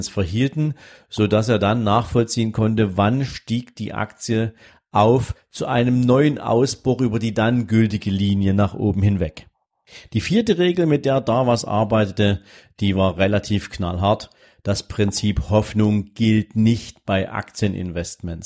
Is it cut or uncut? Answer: uncut